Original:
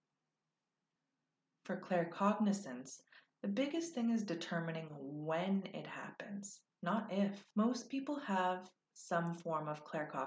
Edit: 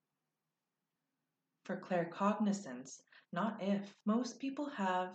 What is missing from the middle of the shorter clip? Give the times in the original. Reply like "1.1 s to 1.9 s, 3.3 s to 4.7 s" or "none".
3.2 s to 6.7 s